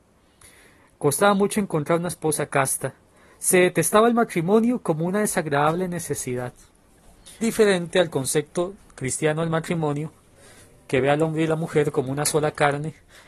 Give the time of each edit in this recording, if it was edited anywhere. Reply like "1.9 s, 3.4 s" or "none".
7.4 s

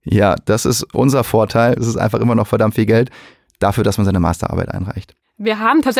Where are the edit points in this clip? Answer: 1.8 s

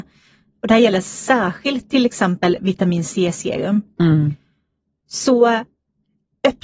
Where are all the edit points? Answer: none

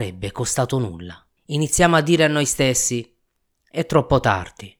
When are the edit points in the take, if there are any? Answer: 1.4 s

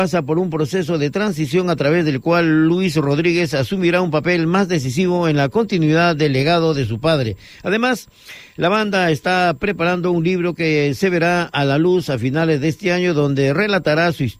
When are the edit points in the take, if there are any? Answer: none

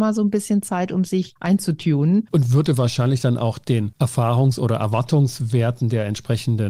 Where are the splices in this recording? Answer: 2.3 s

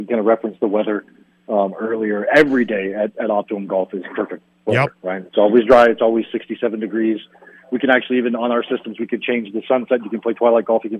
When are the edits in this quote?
none

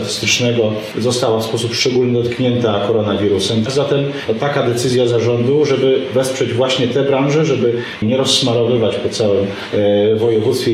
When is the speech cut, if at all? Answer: 3.7 s, 8.0 s

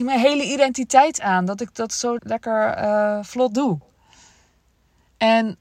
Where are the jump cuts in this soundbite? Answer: 2.2 s

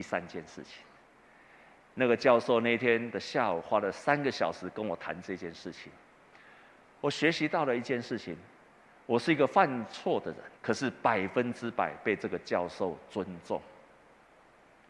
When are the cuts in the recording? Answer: 10.6 s

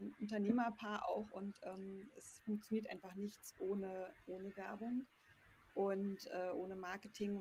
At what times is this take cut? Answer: none

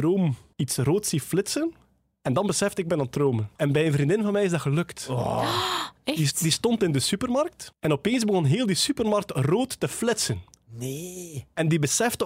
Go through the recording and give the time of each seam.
none

